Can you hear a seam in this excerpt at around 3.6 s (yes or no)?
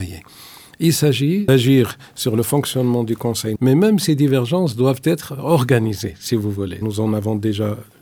yes